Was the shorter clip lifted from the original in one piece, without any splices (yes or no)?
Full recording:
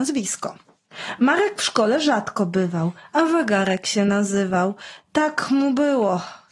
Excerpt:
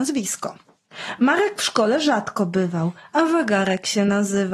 yes